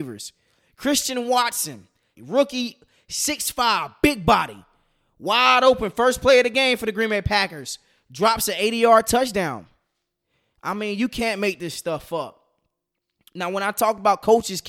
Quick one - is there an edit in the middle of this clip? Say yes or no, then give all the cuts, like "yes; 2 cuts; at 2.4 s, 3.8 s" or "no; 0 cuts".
yes; 1 cut; at 2.2 s